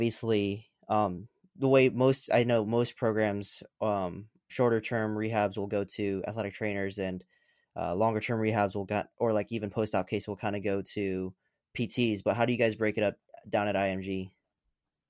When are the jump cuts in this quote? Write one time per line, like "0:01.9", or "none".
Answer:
0:04.5